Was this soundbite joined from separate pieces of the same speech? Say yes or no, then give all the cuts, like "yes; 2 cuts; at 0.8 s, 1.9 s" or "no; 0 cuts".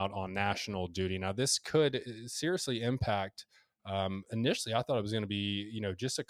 no; 0 cuts